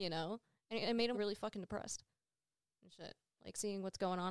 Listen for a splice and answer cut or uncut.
cut